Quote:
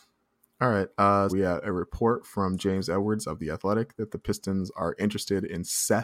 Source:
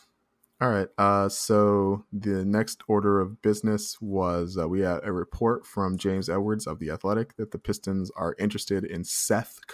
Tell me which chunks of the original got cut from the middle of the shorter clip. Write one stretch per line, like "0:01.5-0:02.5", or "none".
0:01.3-0:04.7